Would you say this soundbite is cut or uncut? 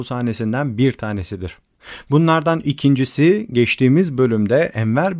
uncut